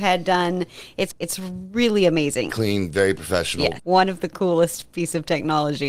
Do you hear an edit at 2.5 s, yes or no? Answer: yes